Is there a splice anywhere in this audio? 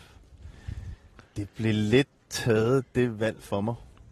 no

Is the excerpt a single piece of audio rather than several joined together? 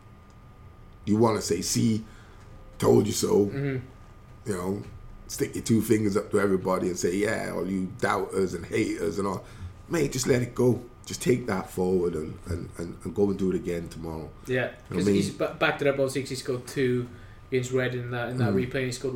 yes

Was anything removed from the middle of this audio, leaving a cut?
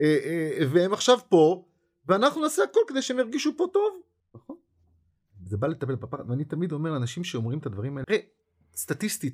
yes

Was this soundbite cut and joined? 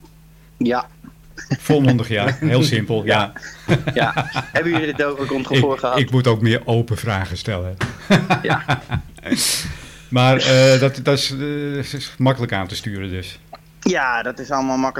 no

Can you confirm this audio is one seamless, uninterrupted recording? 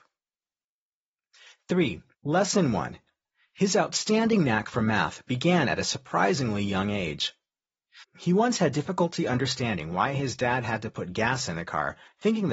no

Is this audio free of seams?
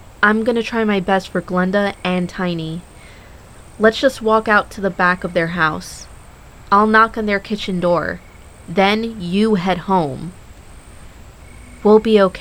yes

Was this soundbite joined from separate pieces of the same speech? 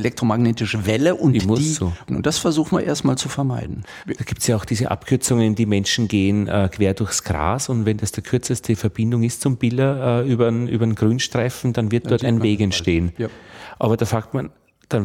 yes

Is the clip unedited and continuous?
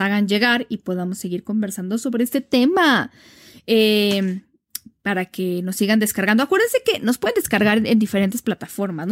yes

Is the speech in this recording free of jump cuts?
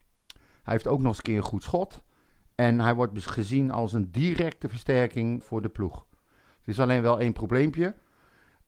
no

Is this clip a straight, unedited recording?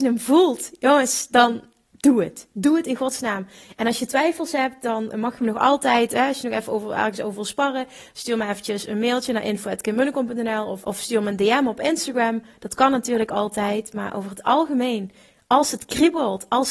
no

